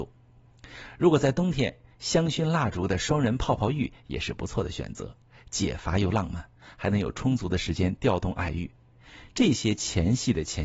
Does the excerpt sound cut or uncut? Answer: uncut